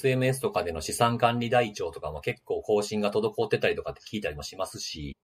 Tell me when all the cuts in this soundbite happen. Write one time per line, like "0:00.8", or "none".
none